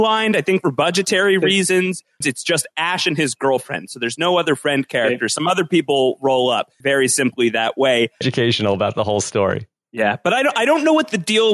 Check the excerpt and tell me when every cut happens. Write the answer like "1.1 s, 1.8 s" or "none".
2.2 s, 6.8 s, 8.2 s